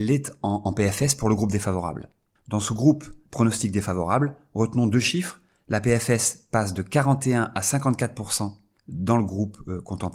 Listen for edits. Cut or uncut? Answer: uncut